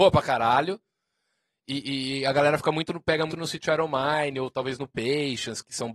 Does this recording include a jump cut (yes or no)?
yes